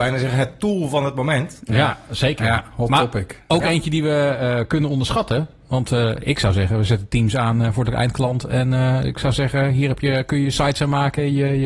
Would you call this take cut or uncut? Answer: uncut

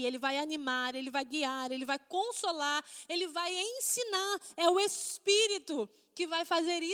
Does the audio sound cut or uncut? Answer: uncut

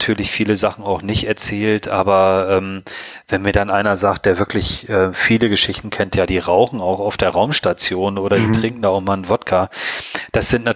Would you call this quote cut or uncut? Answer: uncut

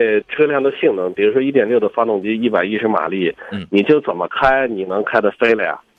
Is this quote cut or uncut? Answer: uncut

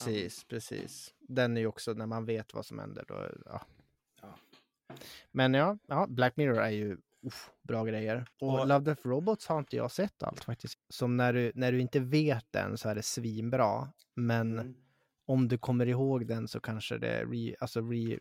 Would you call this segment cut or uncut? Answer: cut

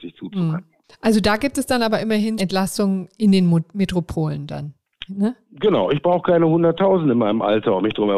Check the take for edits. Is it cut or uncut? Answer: cut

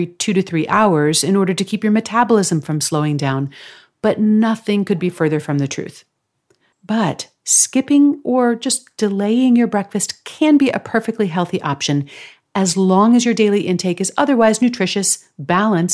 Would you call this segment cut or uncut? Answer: cut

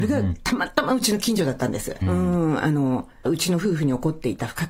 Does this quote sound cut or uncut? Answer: cut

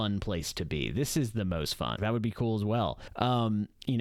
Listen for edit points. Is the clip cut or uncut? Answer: cut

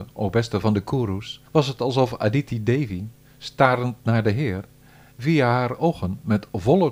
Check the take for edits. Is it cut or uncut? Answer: cut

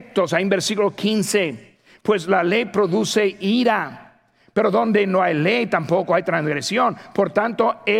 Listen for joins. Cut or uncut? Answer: uncut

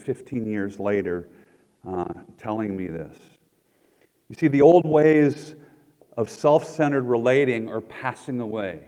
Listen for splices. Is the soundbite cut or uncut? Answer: uncut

